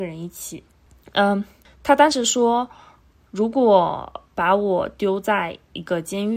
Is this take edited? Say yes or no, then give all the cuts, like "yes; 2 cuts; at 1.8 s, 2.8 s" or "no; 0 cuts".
no; 0 cuts